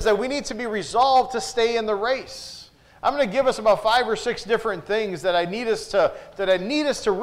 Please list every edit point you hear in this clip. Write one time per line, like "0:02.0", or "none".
none